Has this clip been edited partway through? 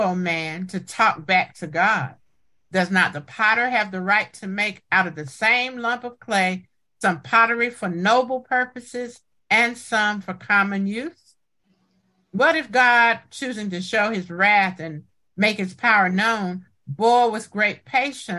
yes; 1 cut; at 2.6 s

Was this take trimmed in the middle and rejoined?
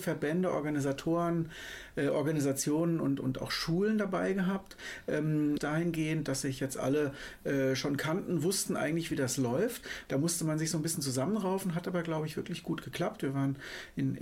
yes; 2 cuts; at 5.6 s, 10.1 s

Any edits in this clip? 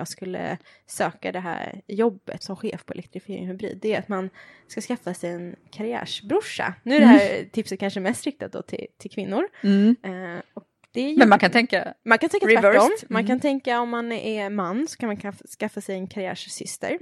yes; 1 cut; at 2.4 s

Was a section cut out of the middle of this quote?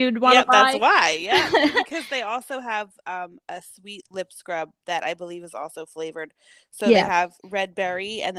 no; 0 cuts

